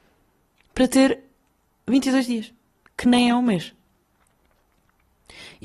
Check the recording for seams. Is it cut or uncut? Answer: uncut